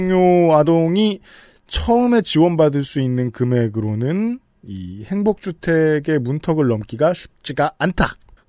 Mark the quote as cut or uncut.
uncut